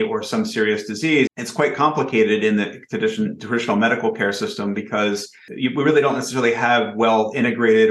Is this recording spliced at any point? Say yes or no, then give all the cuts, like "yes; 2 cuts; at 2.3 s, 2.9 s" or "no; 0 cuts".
yes; 1 cut; at 1.3 s